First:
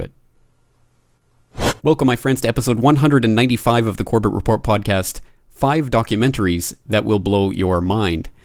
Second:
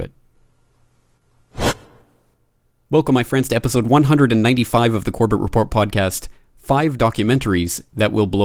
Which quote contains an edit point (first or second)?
first